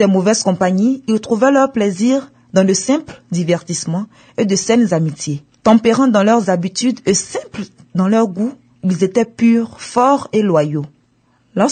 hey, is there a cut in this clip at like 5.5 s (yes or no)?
no